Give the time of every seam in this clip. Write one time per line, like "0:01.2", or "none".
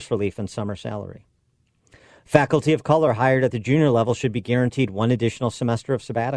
none